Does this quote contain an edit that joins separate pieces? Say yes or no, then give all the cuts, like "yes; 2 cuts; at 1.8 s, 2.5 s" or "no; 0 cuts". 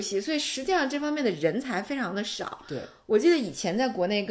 no; 0 cuts